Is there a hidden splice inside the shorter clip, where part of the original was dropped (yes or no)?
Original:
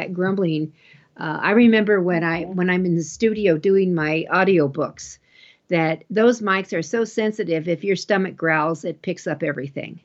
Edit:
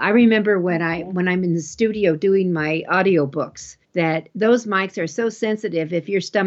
yes